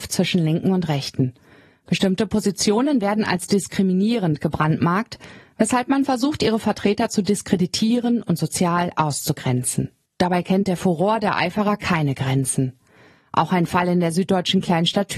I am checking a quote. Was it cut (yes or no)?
no